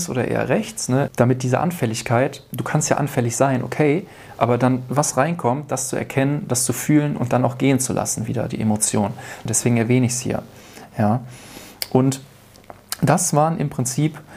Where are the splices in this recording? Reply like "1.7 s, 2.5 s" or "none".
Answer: 1.1 s, 9.5 s